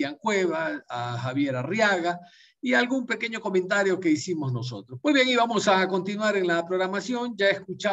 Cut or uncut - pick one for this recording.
cut